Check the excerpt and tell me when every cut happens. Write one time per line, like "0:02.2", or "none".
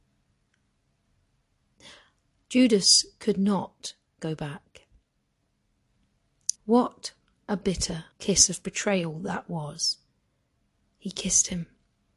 0:06.6
0:08.1